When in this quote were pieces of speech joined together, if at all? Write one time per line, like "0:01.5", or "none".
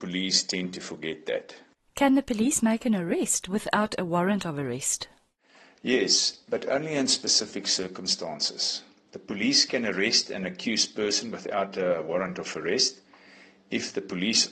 none